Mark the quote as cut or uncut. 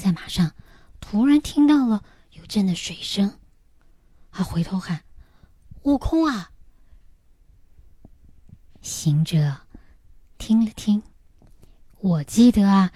cut